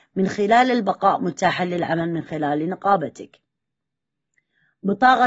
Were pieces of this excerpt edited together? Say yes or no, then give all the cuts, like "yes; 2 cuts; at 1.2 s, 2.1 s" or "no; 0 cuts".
no; 0 cuts